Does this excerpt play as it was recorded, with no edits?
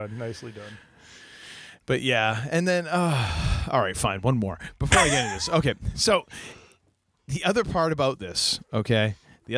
yes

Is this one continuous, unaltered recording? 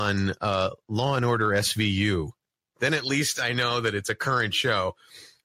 yes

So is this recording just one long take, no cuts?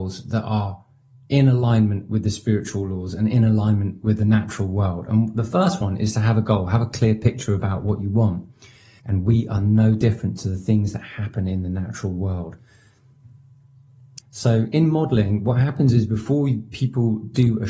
no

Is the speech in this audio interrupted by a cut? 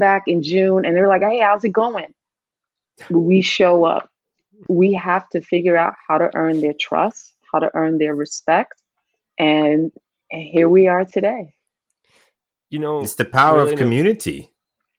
no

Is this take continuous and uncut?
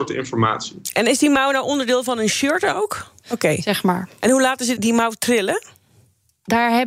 no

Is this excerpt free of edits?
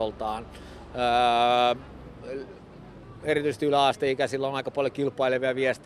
yes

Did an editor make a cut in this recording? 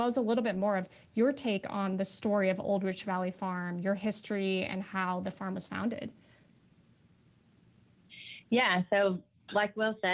no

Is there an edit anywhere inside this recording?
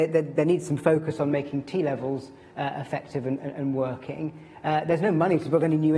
no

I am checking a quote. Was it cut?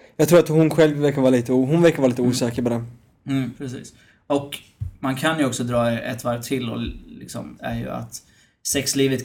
yes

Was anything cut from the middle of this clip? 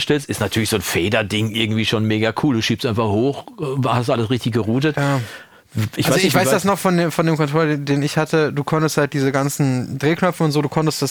no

